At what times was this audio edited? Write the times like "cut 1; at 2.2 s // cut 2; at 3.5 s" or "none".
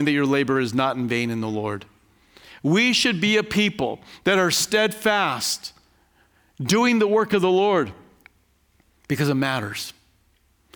none